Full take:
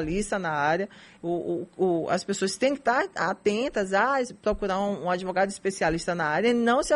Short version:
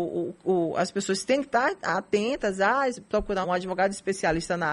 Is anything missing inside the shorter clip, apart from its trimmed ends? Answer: yes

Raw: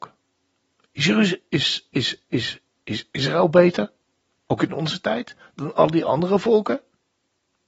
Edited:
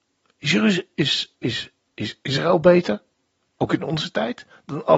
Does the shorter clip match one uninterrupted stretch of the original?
no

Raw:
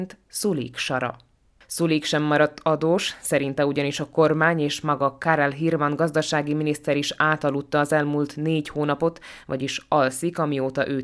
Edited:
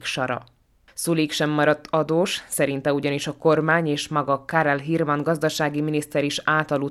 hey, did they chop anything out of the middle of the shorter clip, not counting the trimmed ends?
no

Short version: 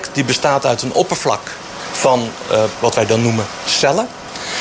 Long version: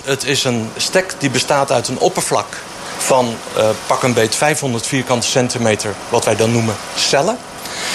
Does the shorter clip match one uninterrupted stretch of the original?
no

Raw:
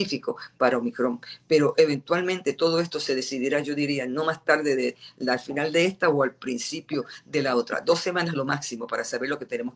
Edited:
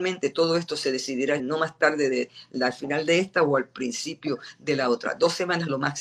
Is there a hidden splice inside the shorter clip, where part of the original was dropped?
yes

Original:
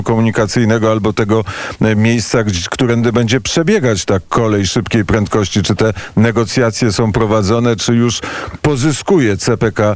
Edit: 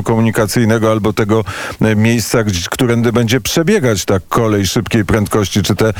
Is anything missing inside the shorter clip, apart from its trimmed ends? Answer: no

